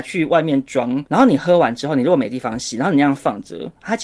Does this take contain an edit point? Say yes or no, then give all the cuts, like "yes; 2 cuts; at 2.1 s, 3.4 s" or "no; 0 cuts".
no; 0 cuts